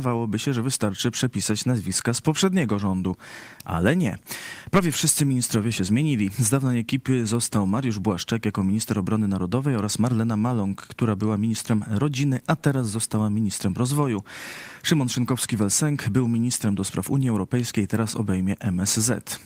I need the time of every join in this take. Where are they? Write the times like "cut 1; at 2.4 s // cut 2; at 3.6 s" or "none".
none